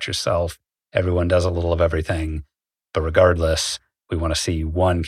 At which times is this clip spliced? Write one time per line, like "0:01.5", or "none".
0:02.8